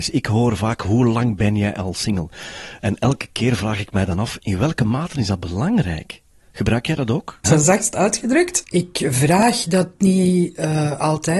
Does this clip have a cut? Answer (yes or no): yes